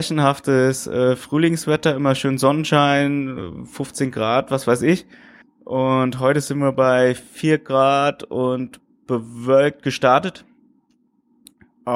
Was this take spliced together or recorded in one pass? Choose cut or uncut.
cut